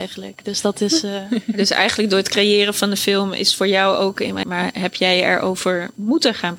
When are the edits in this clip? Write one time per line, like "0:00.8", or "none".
0:04.4